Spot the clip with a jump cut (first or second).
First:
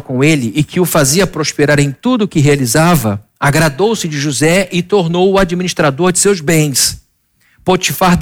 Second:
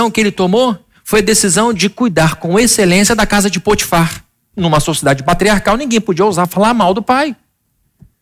second